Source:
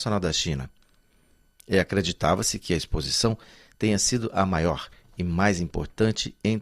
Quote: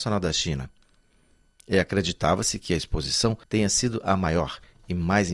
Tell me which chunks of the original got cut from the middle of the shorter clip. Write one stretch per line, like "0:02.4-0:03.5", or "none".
0:03.4-0:03.7